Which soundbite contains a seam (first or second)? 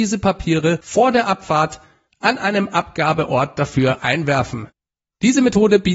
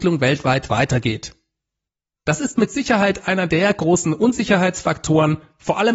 first